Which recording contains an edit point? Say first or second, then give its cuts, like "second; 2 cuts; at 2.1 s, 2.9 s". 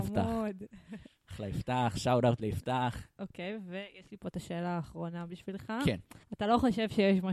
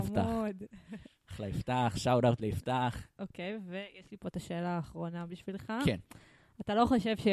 first; 1 cut; at 6.2 s